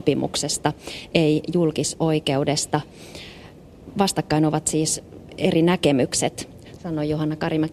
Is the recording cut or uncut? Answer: cut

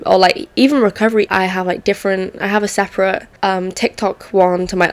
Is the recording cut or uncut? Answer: cut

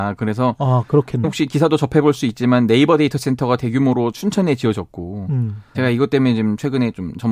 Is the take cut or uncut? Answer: cut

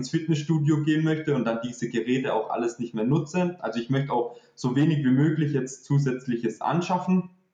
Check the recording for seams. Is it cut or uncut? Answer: uncut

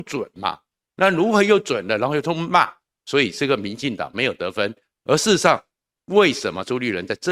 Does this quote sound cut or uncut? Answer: uncut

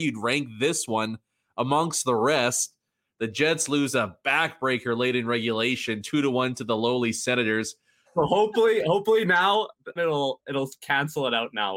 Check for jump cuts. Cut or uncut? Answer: cut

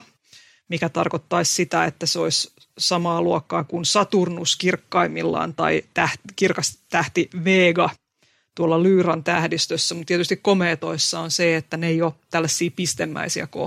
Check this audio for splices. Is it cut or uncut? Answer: uncut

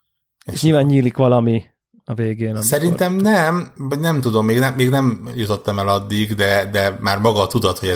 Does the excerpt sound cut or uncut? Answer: uncut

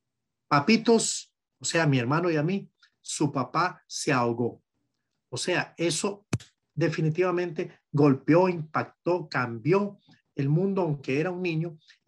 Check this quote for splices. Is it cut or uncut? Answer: uncut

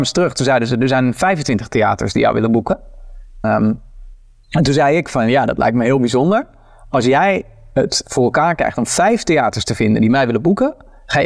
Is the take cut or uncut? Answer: cut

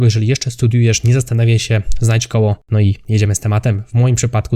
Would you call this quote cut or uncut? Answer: uncut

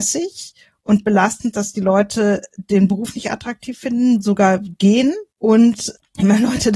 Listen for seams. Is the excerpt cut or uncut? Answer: cut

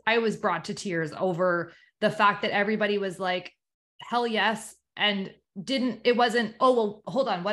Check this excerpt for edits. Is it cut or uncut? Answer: uncut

